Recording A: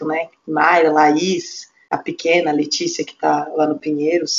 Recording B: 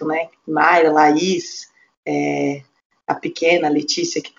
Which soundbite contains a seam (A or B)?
A